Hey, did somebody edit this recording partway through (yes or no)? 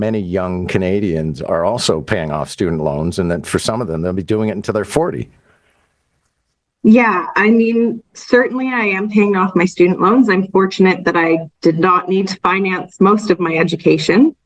no